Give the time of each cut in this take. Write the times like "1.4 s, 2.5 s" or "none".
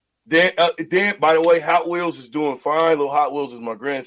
none